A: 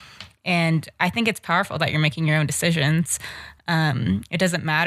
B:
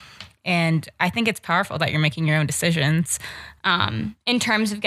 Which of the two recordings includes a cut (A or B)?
B